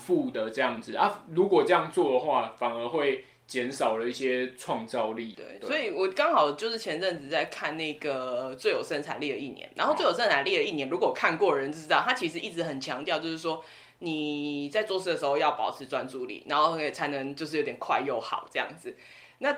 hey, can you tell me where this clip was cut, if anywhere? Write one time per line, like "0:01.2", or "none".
none